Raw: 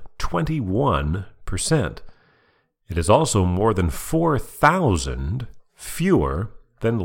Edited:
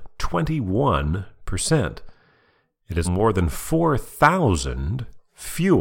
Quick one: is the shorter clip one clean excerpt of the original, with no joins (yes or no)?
no